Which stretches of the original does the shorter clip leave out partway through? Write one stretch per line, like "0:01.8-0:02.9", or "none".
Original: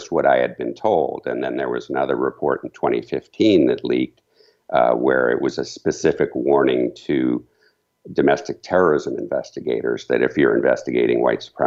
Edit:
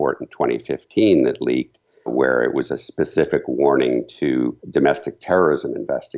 0:04.5-0:04.9
0:07.5-0:08.0